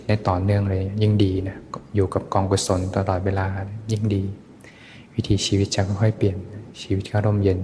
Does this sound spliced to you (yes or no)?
no